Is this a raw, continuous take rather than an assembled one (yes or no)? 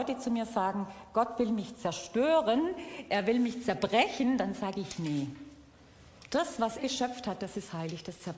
no